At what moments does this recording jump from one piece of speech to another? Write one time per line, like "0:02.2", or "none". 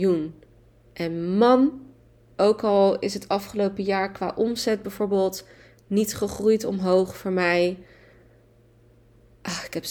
0:02.3

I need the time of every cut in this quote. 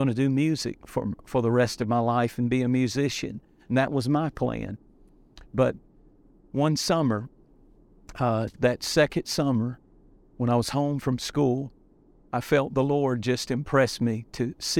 none

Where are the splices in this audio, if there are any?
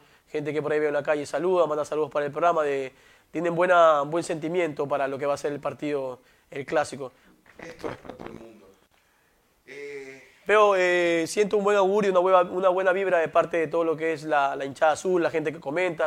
0:07.5

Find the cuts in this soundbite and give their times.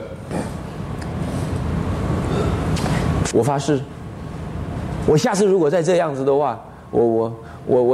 0:03.3

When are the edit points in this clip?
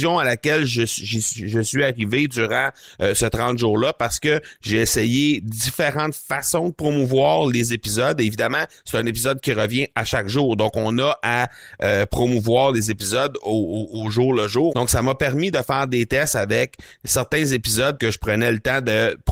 0:14.7
0:18.0

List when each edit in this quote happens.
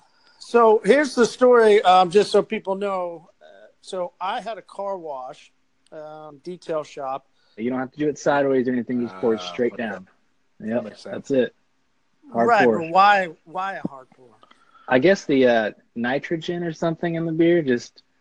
0:07.6

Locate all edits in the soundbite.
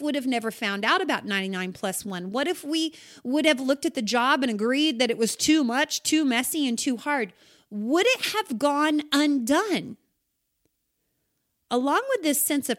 none

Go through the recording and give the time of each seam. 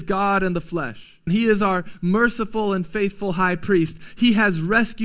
0:01.3

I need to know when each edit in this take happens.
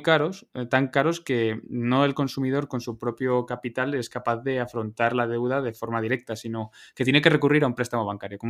none

